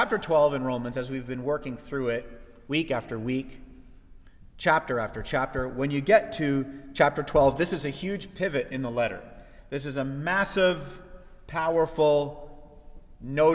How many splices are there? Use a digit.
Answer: 0